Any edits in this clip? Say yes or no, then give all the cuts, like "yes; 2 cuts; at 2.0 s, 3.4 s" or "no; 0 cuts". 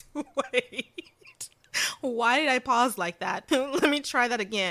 yes; 1 cut; at 3.5 s